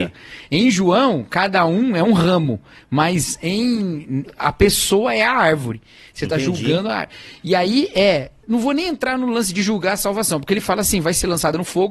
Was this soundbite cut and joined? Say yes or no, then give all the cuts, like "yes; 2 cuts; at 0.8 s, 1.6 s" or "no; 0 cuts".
yes; 2 cuts; at 4.3 s, 8.4 s